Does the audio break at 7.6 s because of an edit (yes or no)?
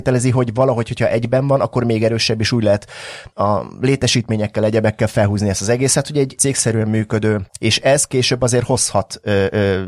yes